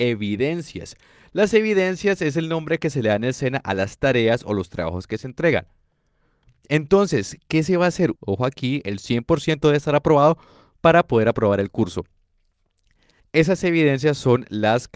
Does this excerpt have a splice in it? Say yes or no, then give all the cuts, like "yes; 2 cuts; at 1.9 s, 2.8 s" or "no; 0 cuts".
yes; 2 cuts; at 8.2 s, 13.2 s